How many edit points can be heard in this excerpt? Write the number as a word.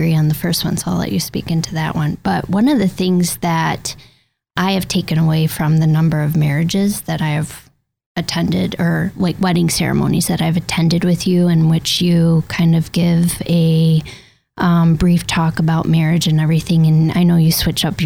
zero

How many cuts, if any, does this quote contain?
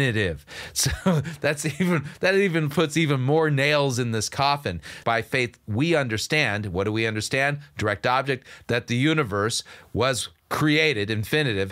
one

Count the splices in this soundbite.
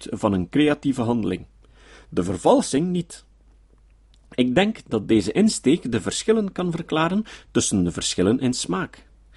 zero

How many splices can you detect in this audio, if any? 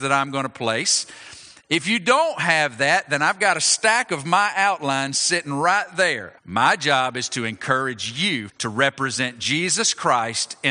two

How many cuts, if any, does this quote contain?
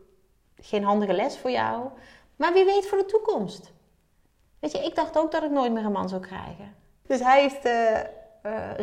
one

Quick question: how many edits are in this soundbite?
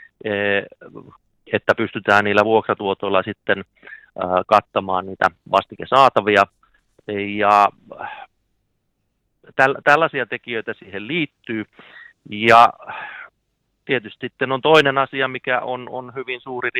zero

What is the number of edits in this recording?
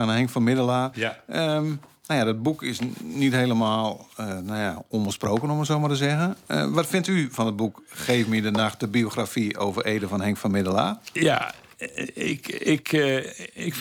zero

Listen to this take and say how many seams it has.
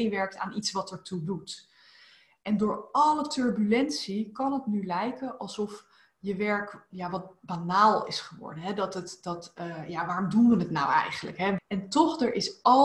one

